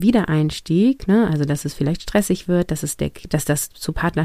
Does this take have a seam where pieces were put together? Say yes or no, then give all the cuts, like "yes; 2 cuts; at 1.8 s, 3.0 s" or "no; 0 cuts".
yes; 1 cut; at 3.3 s